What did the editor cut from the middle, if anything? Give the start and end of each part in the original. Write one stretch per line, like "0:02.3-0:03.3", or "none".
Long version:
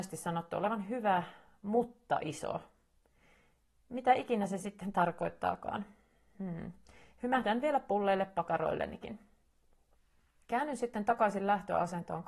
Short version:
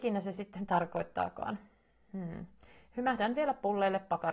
none